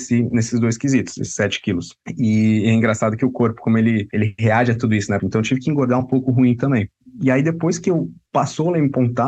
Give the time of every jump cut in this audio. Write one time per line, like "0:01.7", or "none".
0:05.2